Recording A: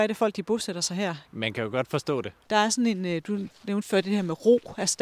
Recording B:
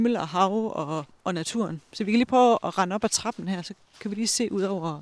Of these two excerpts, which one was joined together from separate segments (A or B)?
A